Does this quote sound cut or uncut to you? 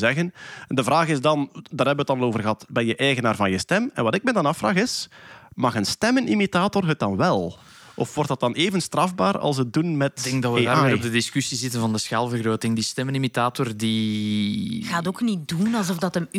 uncut